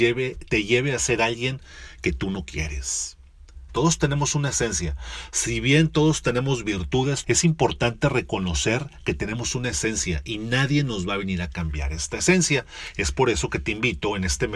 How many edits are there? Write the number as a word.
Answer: two